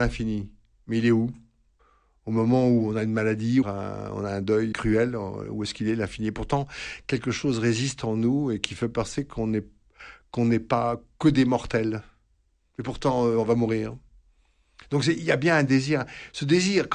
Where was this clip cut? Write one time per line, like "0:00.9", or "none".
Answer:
0:03.6
0:04.7